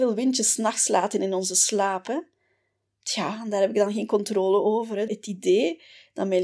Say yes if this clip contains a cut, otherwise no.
yes